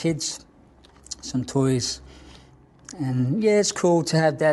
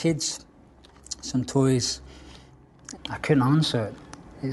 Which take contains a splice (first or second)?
second